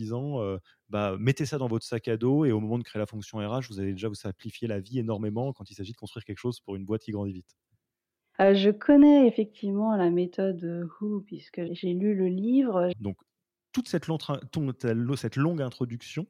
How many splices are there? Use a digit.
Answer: 3